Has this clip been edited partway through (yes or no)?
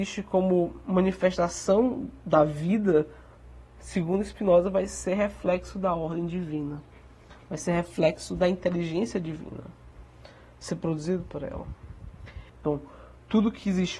yes